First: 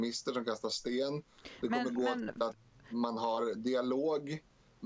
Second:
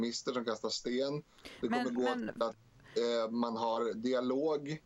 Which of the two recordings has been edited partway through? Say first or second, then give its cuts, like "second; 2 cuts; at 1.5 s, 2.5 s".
first; 1 cut; at 2.9 s